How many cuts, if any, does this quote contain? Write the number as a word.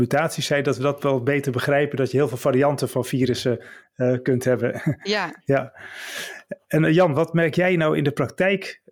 one